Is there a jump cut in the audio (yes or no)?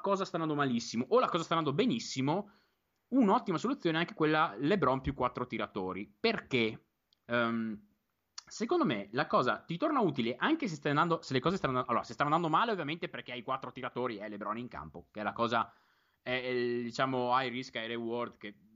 no